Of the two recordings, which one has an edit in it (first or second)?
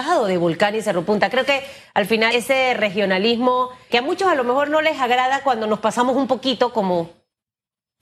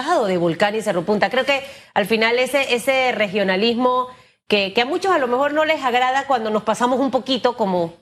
first